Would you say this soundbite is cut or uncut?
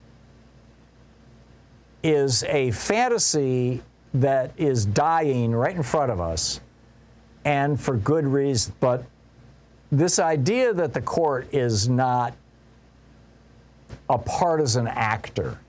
cut